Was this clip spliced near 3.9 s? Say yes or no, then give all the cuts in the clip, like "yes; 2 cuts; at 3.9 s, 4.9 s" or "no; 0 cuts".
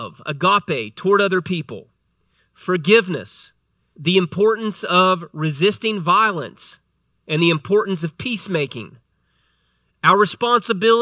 yes; 1 cut; at 3.9 s